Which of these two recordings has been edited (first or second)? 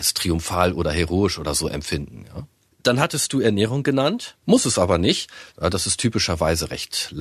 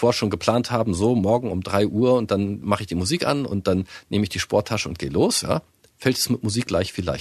first